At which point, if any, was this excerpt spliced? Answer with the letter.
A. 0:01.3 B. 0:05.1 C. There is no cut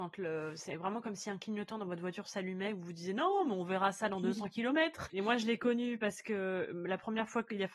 B